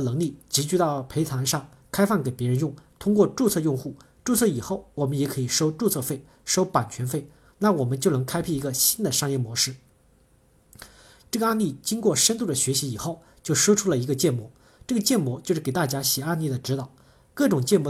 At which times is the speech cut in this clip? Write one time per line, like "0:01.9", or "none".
0:11.2